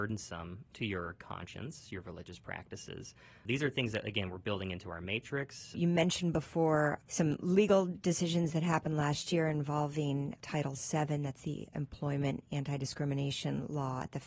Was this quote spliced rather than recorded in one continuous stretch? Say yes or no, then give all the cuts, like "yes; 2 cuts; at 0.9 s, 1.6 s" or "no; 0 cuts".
yes; 1 cut; at 5.7 s